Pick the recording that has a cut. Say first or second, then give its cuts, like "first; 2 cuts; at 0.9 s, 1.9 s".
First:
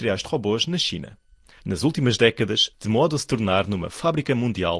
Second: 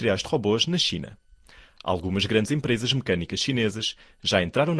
first; 2 cuts; at 1.6 s, 2.7 s